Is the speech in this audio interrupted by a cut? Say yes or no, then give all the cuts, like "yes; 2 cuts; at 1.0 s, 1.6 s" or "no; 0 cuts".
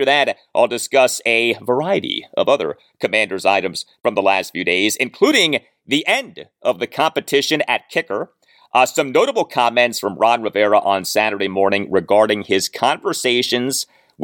no; 0 cuts